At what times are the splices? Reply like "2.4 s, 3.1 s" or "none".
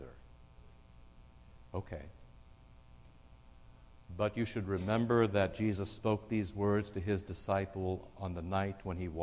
1.7 s